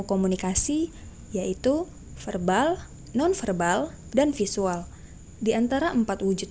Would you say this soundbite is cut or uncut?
cut